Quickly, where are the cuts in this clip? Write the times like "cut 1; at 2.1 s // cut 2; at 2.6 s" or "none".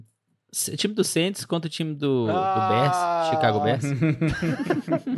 none